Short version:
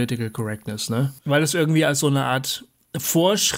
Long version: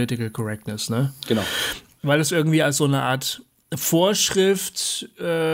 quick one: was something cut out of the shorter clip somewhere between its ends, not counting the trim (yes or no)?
yes